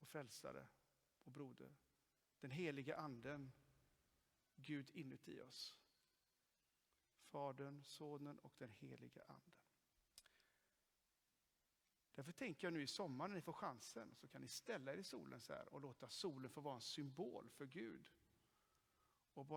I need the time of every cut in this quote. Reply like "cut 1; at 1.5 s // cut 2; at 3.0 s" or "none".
cut 1; at 12.1 s